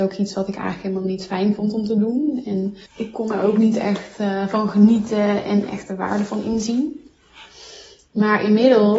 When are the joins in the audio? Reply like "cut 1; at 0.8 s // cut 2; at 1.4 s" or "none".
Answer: cut 1; at 2.9 s